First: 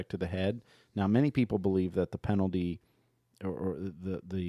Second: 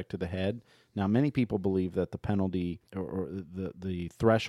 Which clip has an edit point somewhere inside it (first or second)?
second